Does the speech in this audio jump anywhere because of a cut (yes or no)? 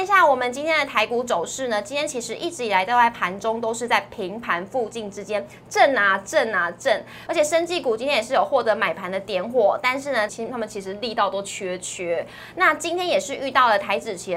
yes